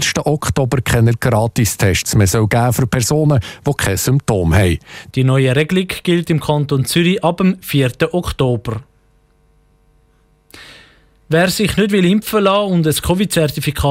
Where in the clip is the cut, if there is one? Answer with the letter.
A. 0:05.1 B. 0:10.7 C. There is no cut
A